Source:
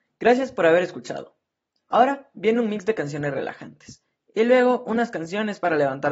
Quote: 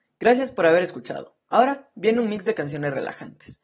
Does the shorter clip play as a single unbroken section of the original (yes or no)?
no